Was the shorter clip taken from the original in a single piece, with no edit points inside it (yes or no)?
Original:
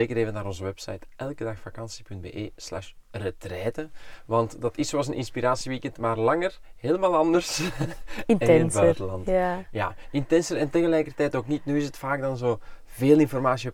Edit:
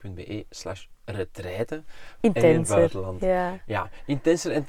no